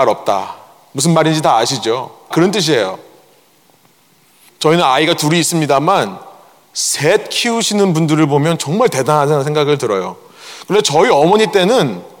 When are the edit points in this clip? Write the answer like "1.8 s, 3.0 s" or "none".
2.3 s